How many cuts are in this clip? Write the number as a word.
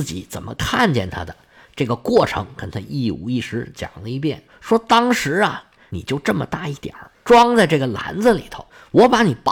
zero